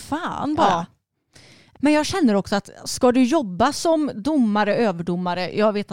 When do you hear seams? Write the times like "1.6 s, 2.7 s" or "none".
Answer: 1.7 s